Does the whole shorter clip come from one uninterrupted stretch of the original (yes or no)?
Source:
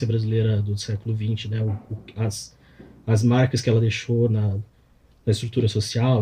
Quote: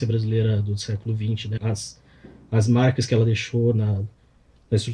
no